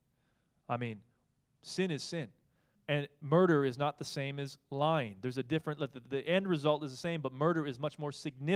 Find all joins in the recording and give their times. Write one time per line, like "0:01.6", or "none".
0:02.8